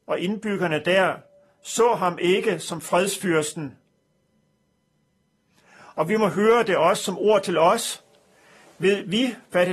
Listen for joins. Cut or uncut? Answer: uncut